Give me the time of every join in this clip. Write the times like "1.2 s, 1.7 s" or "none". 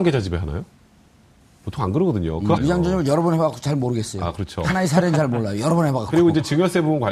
2.6 s